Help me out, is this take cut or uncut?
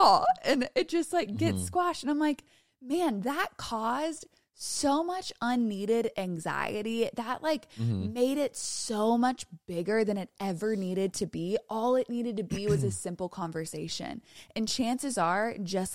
uncut